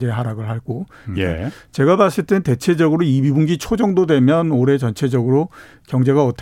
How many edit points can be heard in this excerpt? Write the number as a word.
one